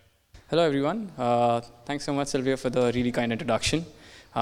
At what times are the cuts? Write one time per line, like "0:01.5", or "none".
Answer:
none

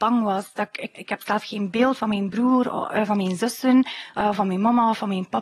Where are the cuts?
0:00.9

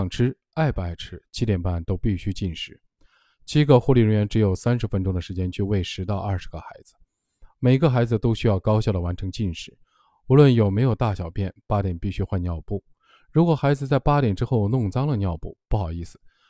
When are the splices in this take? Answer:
none

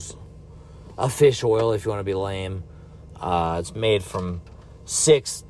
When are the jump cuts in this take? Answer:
none

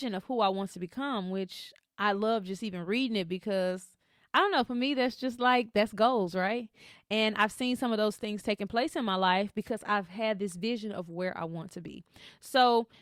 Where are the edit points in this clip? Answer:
none

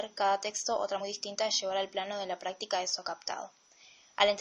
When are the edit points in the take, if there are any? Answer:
0:01.0

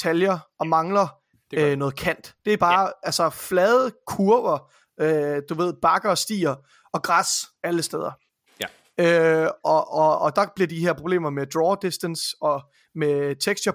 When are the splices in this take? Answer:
none

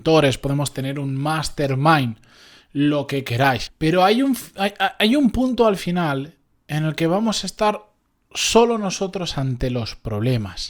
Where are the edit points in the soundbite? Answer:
0:03.7

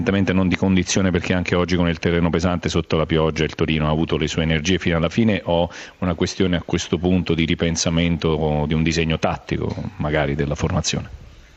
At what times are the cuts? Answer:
none

